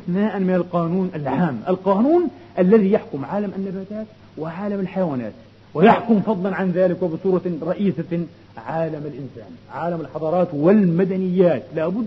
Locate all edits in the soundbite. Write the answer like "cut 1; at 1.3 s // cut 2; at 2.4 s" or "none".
none